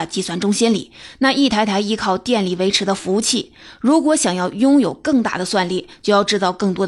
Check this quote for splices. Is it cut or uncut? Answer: uncut